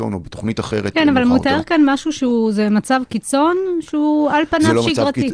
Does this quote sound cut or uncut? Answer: uncut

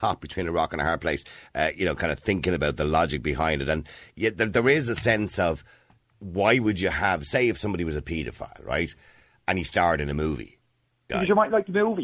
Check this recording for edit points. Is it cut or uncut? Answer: cut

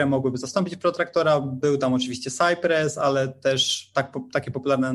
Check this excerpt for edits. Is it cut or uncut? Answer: uncut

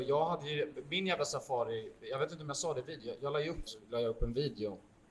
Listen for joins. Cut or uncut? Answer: cut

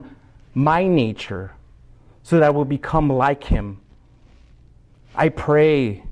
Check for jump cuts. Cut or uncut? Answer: uncut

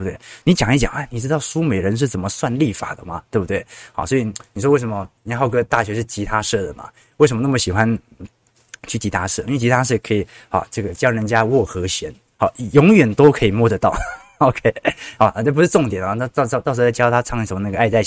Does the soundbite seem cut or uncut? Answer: cut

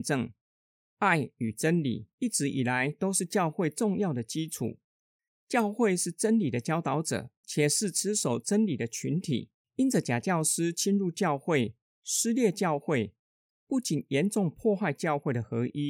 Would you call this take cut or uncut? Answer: cut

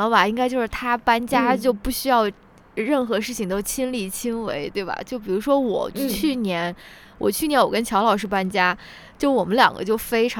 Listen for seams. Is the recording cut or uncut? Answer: uncut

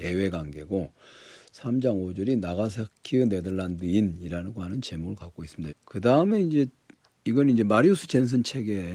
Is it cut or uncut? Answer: cut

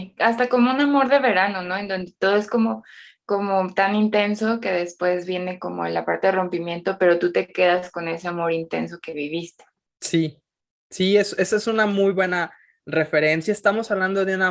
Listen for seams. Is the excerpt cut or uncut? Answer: uncut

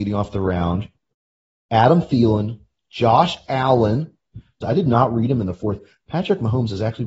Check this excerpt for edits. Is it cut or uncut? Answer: cut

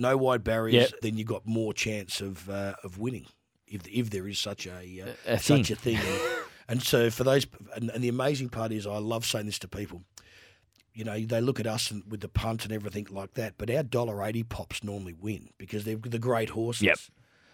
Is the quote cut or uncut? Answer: cut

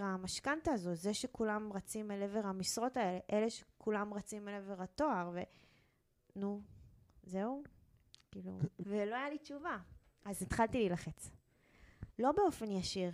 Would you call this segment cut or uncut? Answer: cut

